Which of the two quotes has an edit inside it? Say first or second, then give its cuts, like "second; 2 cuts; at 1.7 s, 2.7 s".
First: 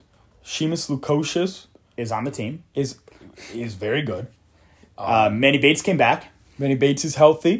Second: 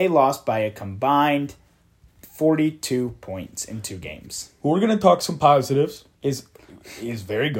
second; 1 cut; at 6.1 s